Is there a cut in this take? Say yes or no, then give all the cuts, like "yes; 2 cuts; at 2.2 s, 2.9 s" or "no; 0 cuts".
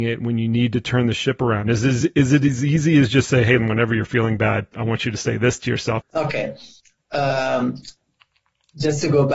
yes; 2 cuts; at 3.6 s, 6.0 s